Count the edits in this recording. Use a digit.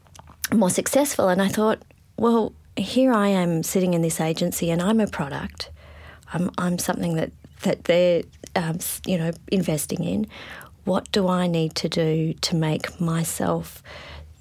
0